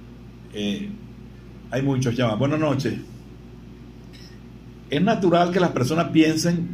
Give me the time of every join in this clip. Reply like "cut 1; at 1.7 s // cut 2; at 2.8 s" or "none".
none

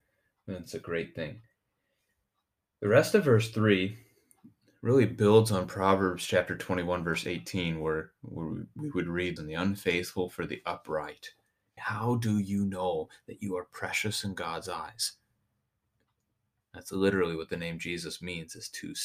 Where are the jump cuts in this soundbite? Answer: cut 1; at 9.4 s // cut 2; at 11.8 s // cut 3; at 16.6 s

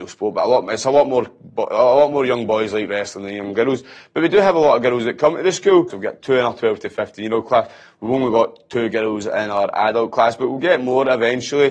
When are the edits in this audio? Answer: cut 1; at 5.9 s

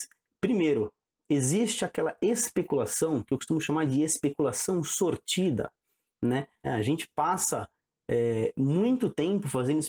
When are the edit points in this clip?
cut 1; at 6.6 s

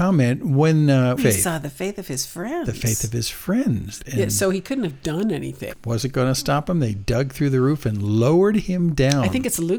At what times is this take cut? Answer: cut 1; at 1.2 s // cut 2; at 4.0 s // cut 3; at 5.7 s

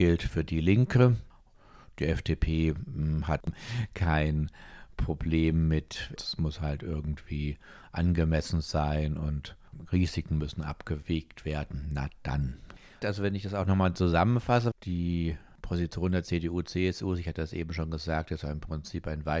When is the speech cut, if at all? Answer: cut 1; at 6.2 s // cut 2; at 13.0 s // cut 3; at 14.7 s

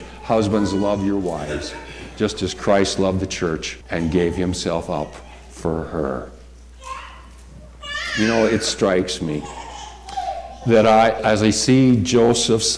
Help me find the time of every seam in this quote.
cut 1; at 3.8 s // cut 2; at 11.2 s

